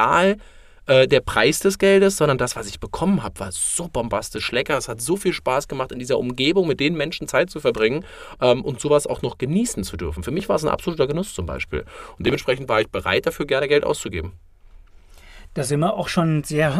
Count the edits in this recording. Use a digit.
0